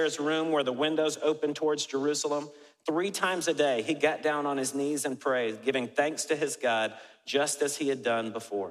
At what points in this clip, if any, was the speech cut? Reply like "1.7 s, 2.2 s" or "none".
none